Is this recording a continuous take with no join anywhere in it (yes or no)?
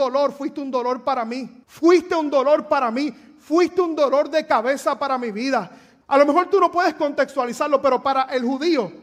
no